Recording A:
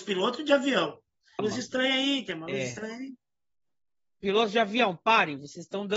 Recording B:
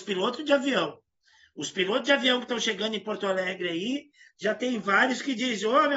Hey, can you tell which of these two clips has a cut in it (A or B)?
A